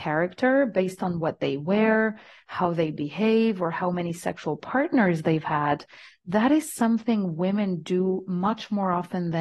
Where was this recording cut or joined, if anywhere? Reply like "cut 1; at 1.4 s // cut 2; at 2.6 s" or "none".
none

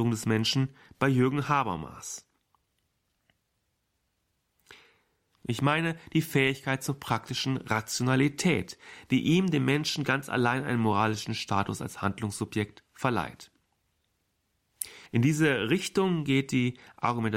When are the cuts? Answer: cut 1; at 5.3 s // cut 2; at 15.1 s

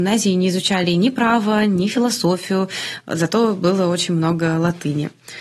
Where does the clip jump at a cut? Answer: none

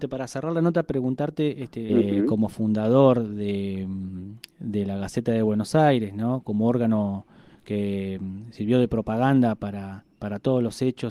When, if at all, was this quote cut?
cut 1; at 1.9 s

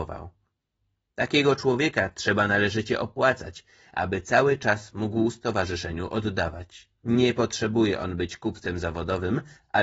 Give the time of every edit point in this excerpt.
cut 1; at 6.9 s

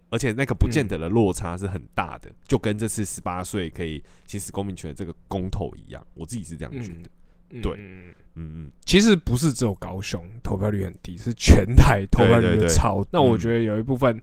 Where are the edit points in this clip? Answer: cut 1; at 8.7 s // cut 2; at 13.1 s

